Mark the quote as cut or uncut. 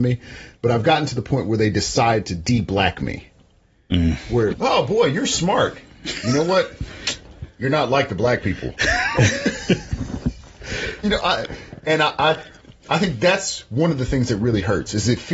cut